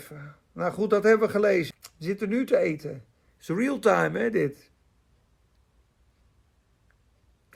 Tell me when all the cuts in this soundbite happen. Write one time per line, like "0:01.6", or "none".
0:01.7